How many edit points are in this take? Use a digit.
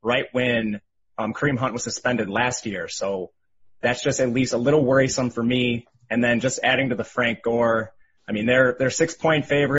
0